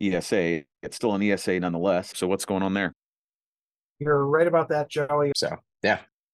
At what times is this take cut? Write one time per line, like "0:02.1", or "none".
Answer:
0:02.1
0:05.3